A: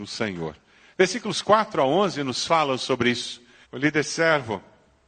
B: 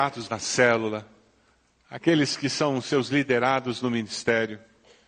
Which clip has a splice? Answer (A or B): A